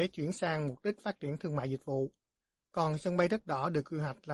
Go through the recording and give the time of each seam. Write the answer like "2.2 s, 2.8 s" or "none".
none

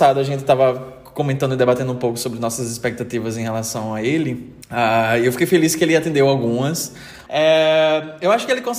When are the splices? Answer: 4.6 s, 7.3 s

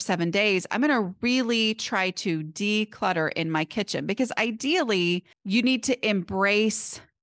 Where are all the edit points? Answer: 5.3 s

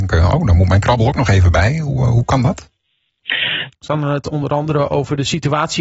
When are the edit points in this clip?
3.7 s

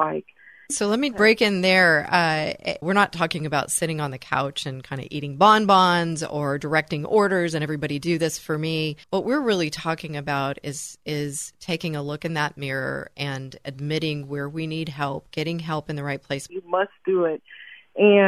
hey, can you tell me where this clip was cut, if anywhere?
2.8 s, 9.0 s, 16.5 s

